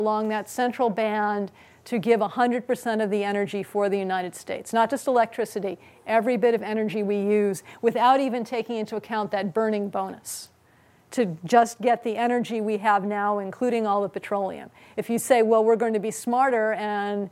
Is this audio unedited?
yes; 0 cuts

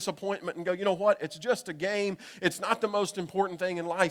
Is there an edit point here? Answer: no; 0 cuts

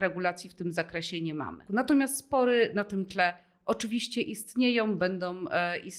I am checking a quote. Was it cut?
yes; 1 cut; at 1.7 s

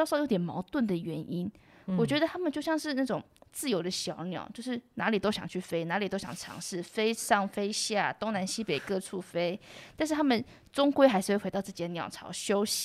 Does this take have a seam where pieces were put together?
no; 0 cuts

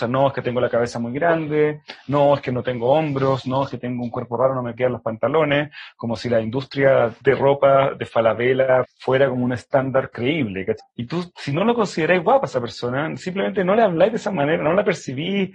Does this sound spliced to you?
yes; 2 cuts; at 8.8 s, 10.8 s

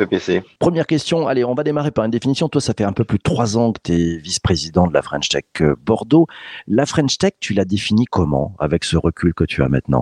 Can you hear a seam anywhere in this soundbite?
no; 0 cuts

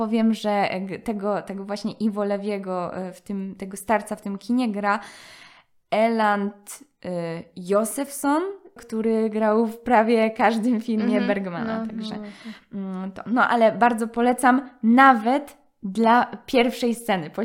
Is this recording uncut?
no; 1 cut; at 8.8 s

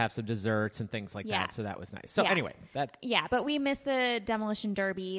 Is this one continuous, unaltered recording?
yes; 0 cuts

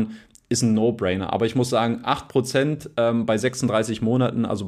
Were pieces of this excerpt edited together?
no; 0 cuts

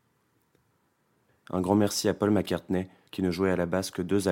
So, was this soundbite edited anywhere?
yes; 2 cuts; at 1.3 s, 3.1 s

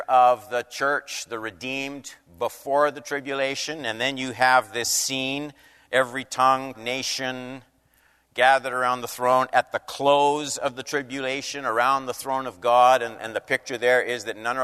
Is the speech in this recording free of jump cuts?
no; 1 cut; at 6.7 s

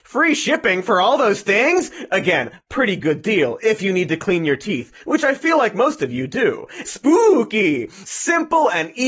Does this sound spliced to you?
yes; 2 cuts; at 6.8 s, 8.0 s

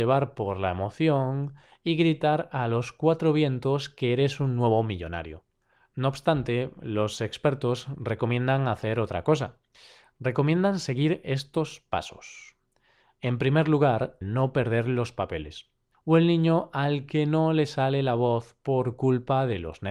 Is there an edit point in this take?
yes; 2 cuts; at 14.2 s, 15.9 s

